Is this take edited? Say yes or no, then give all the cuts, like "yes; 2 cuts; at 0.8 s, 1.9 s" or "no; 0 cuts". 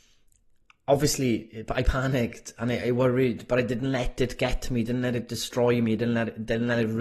no; 0 cuts